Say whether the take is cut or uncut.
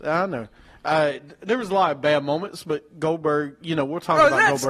uncut